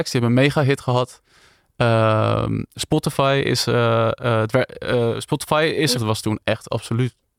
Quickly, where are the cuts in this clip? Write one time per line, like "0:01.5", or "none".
0:05.9